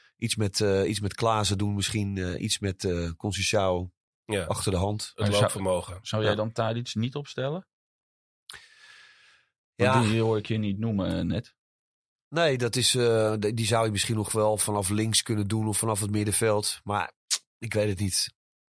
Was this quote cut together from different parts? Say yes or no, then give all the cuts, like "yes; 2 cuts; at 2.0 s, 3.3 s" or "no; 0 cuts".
no; 0 cuts